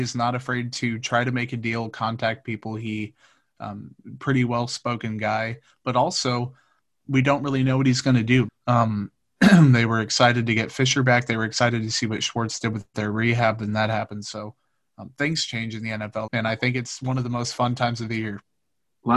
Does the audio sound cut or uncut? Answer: cut